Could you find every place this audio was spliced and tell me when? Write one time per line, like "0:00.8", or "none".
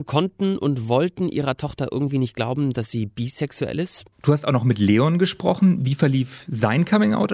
0:04.1